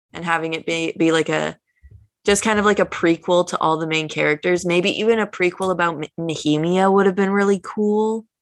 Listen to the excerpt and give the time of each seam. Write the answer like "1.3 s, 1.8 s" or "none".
none